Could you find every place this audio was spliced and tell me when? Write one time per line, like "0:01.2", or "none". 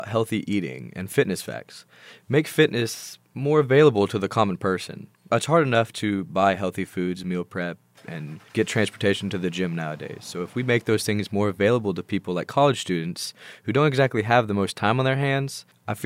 none